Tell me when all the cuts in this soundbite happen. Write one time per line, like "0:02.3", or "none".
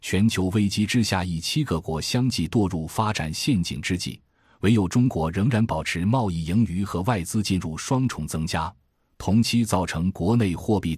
none

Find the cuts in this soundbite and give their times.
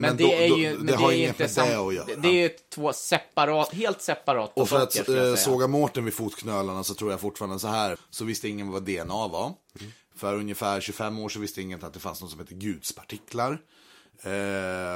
0:08.0

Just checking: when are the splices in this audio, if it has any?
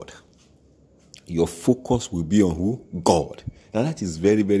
none

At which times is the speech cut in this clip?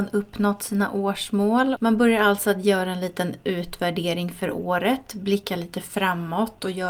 0:01.8

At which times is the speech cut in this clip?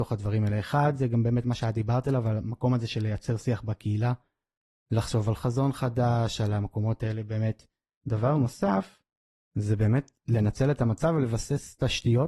0:08.0

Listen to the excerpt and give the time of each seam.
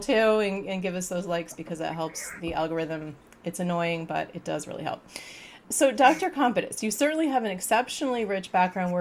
none

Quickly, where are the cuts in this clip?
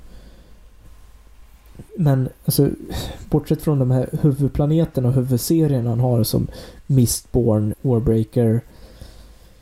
0:07.7

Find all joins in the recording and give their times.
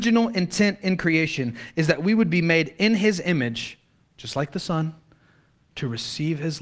none

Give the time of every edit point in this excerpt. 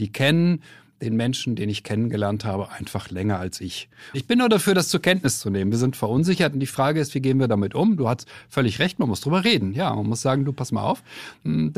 0:04.1

